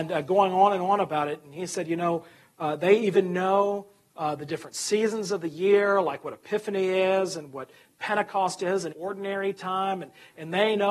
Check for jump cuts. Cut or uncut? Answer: cut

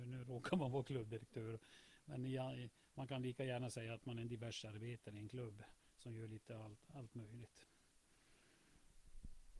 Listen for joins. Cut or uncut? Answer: uncut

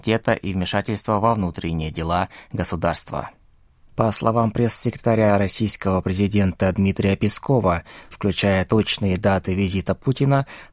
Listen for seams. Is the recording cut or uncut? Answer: cut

